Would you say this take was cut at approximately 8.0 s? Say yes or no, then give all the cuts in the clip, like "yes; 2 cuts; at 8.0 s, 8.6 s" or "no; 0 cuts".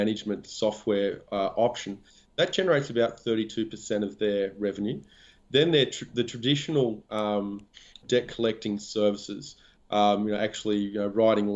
yes; 1 cut; at 8.0 s